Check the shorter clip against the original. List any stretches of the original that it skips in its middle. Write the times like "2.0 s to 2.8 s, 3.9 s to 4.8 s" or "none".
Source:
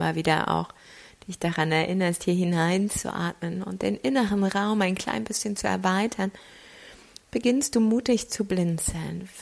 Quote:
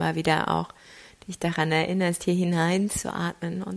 none

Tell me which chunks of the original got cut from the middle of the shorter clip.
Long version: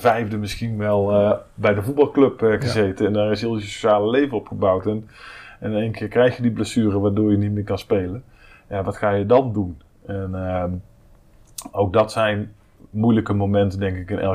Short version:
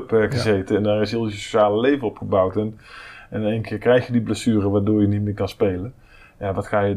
none

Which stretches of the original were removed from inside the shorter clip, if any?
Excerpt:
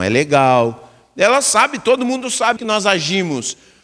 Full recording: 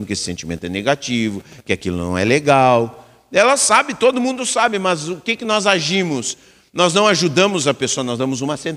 4.7 s to 5.4 s

